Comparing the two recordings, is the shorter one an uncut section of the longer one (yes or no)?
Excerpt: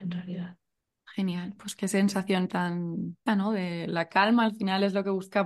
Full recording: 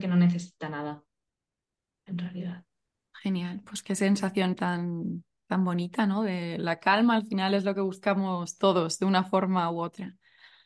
no